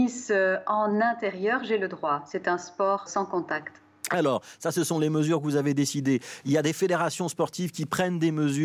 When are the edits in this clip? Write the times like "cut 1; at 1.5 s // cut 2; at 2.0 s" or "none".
cut 1; at 3.1 s